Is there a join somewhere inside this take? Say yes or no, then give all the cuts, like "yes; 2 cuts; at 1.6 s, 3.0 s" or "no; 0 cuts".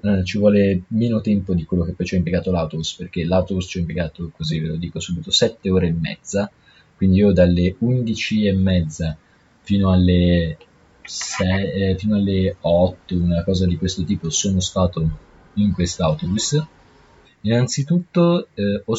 yes; 1 cut; at 17.2 s